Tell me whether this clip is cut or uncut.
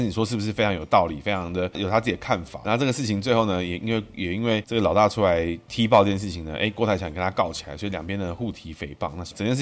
cut